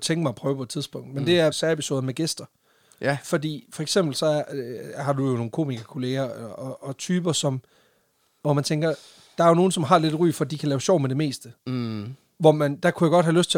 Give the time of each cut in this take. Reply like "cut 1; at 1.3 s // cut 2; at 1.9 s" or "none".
cut 1; at 1.5 s